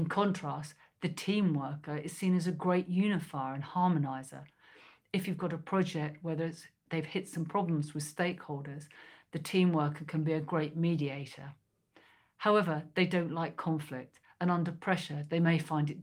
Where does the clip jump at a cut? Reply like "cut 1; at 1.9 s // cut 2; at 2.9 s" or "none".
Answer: none